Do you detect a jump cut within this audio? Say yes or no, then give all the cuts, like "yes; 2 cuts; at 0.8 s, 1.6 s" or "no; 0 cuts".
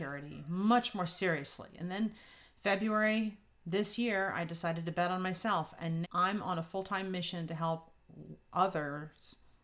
yes; 1 cut; at 6.0 s